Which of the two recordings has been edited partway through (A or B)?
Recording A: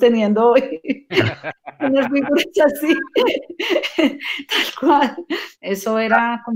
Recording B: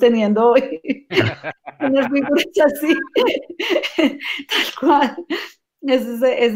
A